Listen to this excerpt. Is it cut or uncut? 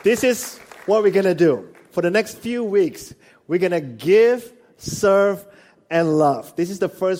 uncut